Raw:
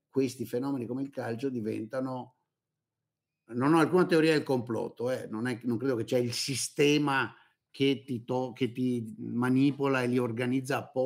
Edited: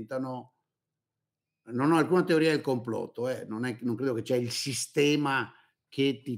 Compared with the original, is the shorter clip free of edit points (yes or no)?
yes